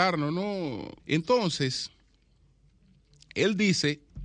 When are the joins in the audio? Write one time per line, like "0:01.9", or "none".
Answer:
0:01.0